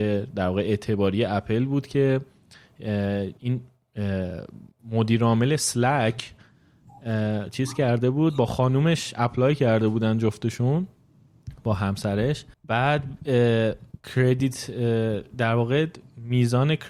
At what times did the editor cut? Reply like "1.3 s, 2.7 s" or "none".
3.4 s, 12.5 s

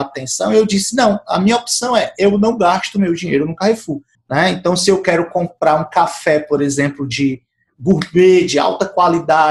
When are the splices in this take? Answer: 4.1 s

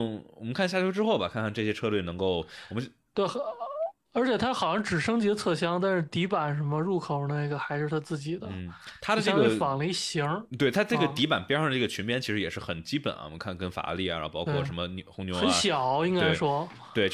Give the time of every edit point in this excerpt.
4.0 s

